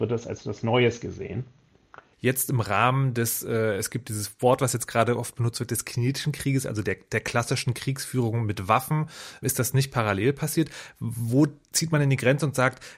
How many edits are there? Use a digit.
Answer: 2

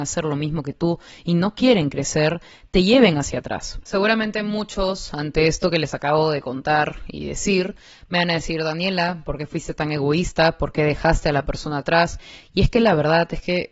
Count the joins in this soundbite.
1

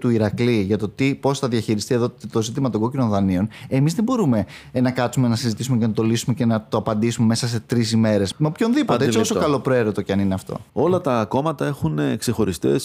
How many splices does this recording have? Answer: 2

